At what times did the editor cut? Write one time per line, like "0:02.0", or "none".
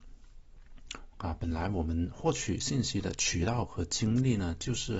0:01.1